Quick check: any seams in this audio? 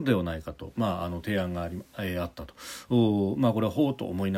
yes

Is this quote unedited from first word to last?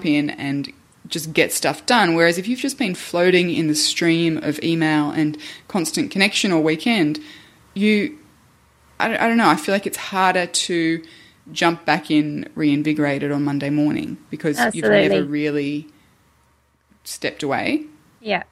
yes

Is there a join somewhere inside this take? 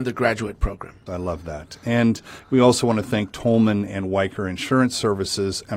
yes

